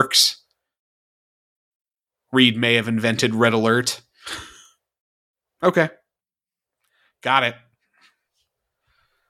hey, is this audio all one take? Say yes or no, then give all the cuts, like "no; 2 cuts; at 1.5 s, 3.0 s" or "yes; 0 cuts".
yes; 0 cuts